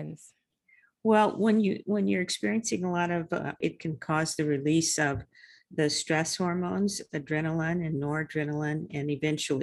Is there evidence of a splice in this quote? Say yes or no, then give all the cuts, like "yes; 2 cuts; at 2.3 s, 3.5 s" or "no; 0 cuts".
yes; 1 cut; at 3.6 s